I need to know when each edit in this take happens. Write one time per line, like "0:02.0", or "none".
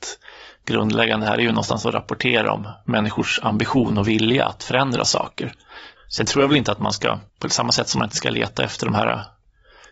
0:06.0
0:07.3